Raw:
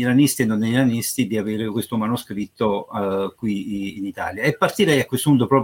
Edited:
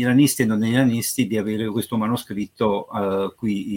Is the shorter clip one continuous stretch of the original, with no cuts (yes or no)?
yes